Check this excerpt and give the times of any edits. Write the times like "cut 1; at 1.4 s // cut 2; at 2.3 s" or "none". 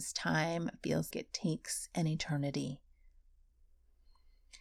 cut 1; at 1.1 s